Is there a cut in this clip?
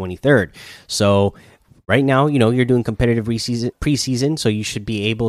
yes; 1 cut; at 3.7 s

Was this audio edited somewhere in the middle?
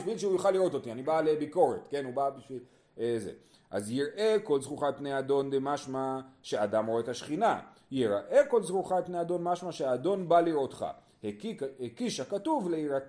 no; 0 cuts

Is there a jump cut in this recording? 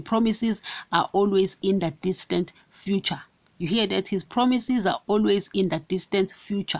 no; 0 cuts

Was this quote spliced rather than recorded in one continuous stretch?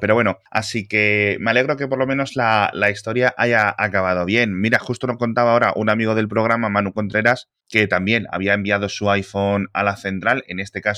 no; 0 cuts

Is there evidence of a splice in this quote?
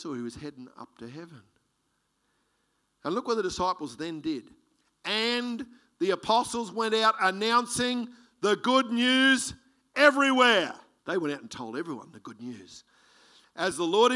yes; 1 cut; at 11.0 s

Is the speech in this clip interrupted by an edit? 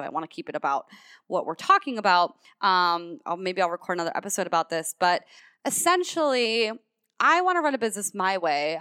no; 0 cuts

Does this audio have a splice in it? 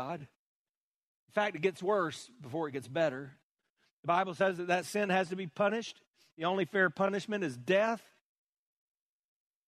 no; 0 cuts

